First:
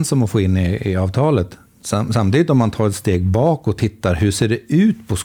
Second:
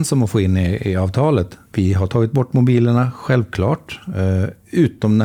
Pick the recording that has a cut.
second; 1 cut; at 1.7 s

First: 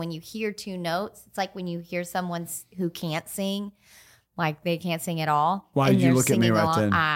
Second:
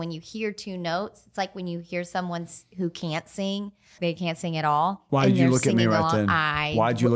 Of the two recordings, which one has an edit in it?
second; 1 cut; at 4.0 s

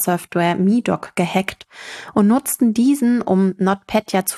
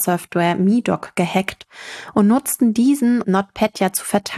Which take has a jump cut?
second; 1 cut; at 3.2 s

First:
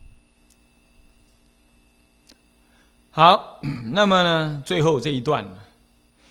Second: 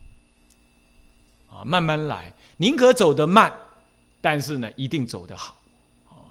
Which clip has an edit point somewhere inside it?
second; 1 cut; at 1.4 s

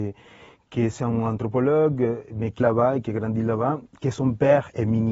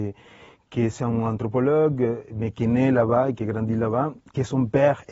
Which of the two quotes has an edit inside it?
first; 1 cut; at 2.6 s

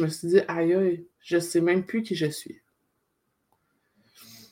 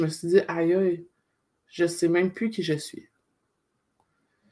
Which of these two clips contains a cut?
first; 1 cut; at 1.1 s

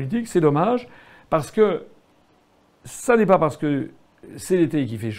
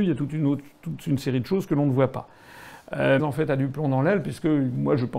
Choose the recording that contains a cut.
second; 1 cut; at 3.2 s

